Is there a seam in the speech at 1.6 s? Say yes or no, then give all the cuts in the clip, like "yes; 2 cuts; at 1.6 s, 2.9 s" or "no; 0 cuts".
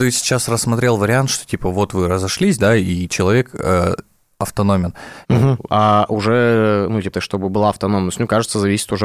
no; 2 cuts; at 5.2 s, 7.1 s